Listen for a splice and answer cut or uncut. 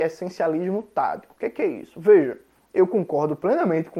uncut